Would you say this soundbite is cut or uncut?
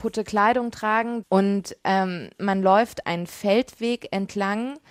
cut